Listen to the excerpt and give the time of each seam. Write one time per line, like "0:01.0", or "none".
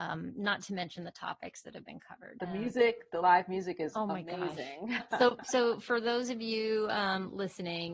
0:02.4
0:05.0